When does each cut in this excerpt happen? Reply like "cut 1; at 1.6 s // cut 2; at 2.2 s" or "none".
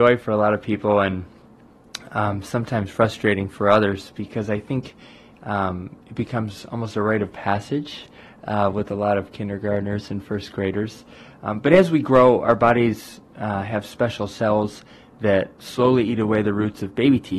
none